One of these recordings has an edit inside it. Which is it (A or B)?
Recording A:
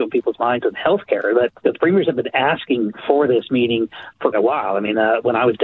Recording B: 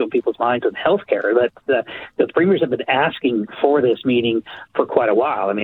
A